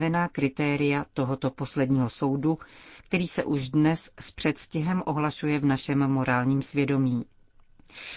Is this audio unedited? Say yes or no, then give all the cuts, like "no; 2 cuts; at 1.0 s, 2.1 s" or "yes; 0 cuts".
yes; 0 cuts